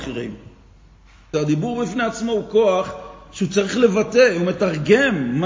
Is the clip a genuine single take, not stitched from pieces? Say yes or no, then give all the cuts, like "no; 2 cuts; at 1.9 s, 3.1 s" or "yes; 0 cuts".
no; 1 cut; at 1.3 s